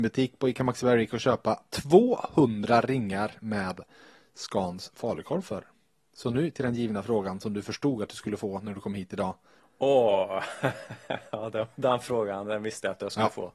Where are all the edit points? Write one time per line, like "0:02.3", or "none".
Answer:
0:09.6